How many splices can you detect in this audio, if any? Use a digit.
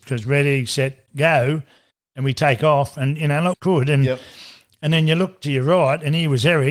1